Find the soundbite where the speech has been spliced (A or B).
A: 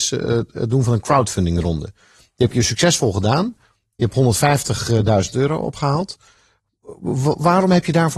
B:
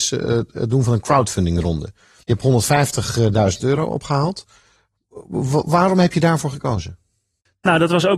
B